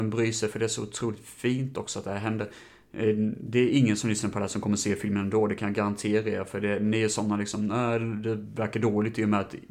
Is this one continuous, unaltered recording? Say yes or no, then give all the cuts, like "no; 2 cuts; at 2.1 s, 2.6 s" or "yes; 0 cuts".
yes; 0 cuts